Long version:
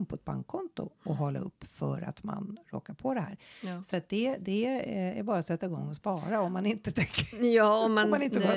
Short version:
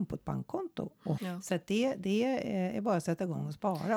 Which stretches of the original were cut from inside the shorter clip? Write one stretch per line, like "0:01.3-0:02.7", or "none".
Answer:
0:01.2-0:03.6